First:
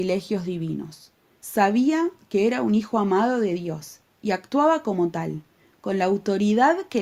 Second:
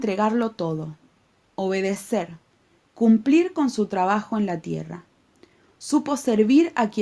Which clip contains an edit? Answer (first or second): first